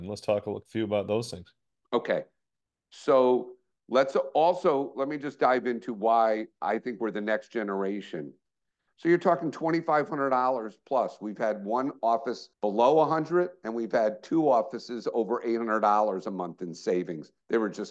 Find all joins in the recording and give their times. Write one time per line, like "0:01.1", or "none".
0:08.9
0:12.5